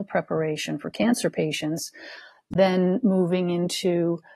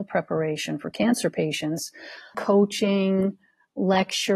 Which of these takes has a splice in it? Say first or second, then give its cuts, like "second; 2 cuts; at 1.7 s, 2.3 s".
second; 1 cut; at 2.3 s